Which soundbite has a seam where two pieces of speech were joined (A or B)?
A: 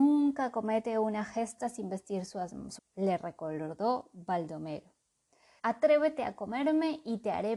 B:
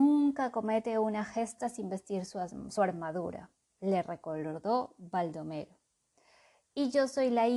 A